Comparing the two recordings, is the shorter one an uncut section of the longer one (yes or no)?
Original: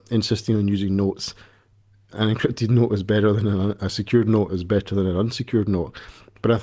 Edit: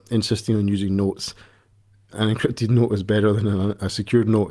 yes